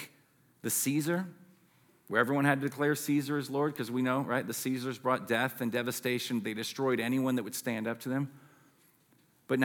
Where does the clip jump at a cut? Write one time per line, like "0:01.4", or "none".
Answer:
none